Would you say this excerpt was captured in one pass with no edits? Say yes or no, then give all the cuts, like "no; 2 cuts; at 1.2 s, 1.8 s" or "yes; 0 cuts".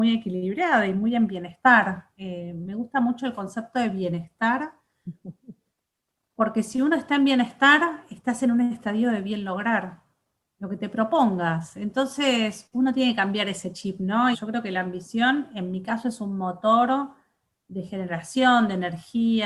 no; 1 cut; at 14.3 s